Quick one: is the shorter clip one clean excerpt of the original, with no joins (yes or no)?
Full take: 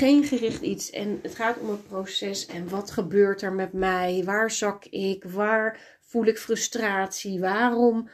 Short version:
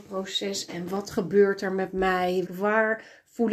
no